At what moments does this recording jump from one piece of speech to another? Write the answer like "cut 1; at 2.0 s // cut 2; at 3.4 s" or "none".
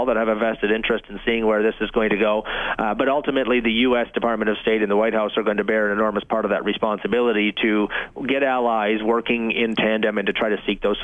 none